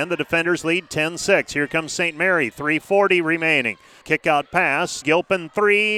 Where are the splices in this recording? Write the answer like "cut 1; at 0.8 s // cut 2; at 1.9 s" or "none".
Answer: cut 1; at 4.0 s // cut 2; at 5.0 s